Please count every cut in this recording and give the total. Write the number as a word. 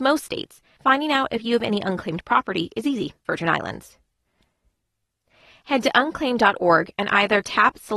one